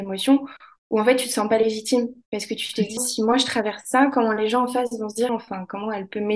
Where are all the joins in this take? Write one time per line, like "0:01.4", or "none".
0:03.0
0:05.3